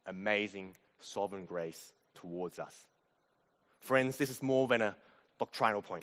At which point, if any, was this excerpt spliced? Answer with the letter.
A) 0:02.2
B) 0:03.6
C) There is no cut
C